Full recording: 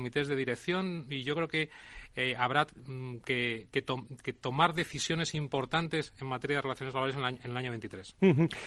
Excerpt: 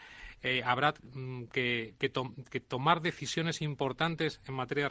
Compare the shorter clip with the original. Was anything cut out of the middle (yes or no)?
no